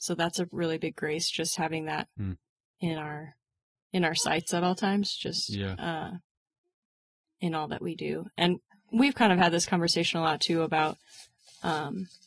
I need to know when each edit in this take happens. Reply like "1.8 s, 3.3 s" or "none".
none

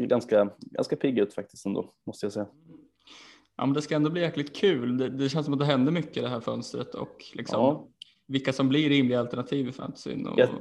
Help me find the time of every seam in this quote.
none

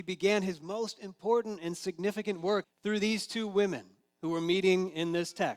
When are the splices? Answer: 2.6 s

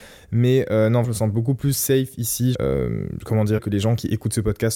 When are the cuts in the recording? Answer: 1.0 s, 2.5 s, 3.6 s

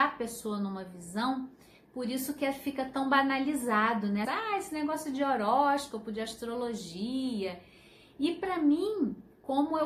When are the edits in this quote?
4.2 s

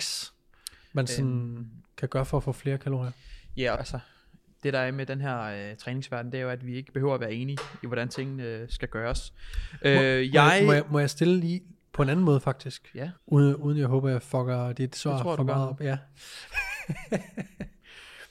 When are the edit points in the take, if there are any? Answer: 3.8 s, 13.2 s

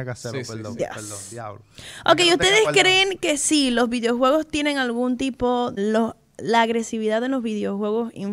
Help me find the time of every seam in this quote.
5.8 s

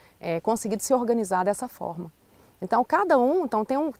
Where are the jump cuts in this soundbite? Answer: none

